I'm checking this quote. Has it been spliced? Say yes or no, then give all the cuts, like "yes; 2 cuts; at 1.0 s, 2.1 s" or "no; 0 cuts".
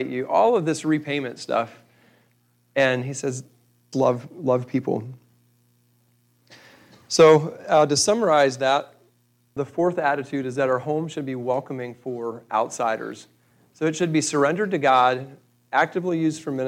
yes; 2 cuts; at 3.9 s, 9.6 s